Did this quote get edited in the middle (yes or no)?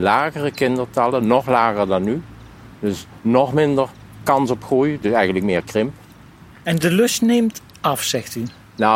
yes